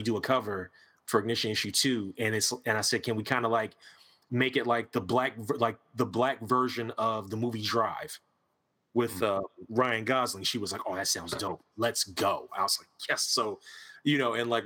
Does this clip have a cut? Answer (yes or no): no